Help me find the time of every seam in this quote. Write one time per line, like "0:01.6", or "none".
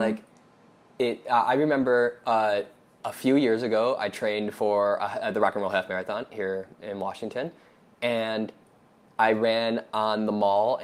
none

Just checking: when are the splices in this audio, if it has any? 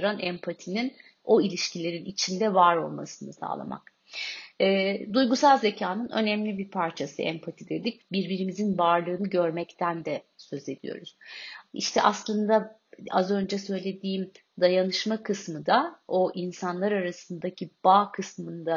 0:08.0
0:11.7

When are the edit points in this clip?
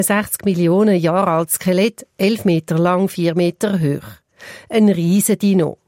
none

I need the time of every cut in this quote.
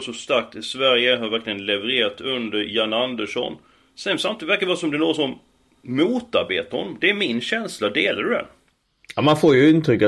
none

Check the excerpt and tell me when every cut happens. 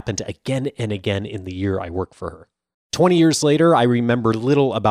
0:02.7

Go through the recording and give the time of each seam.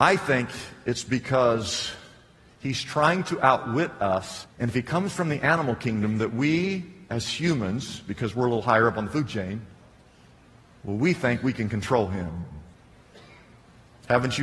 0:04.5

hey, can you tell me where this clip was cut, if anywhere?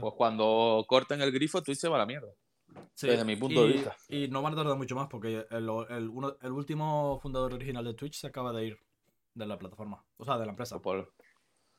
none

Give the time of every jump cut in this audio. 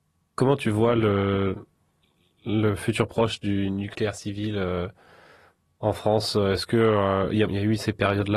0:07.5

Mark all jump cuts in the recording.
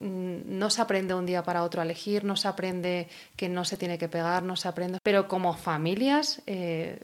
0:05.0

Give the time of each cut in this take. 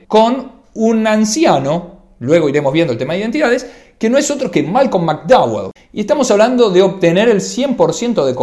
0:05.8

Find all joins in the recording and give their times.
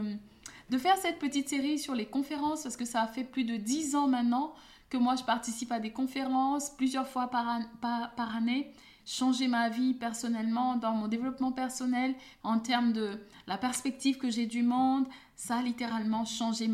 0:09.0
0:12.4

